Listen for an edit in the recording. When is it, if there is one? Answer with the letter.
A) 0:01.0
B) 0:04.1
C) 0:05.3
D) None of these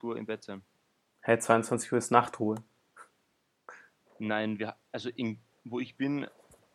B